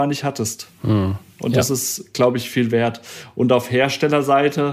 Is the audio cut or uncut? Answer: uncut